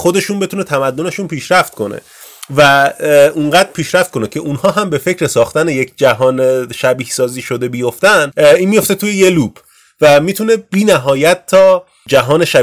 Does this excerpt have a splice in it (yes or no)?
no